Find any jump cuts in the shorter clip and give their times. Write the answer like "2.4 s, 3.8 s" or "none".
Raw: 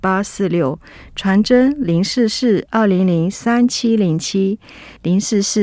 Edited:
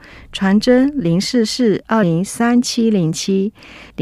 2.0 s